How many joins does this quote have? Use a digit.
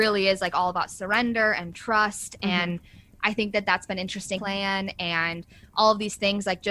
1